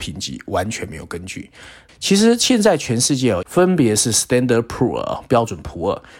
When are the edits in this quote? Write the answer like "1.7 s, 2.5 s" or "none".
1.9 s, 3.4 s